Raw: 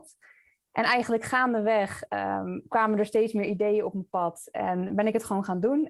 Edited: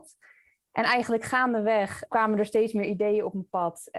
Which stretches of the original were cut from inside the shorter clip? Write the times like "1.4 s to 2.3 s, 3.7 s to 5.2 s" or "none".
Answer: 2.1 s to 2.7 s